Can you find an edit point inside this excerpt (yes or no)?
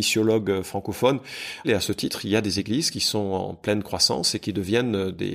yes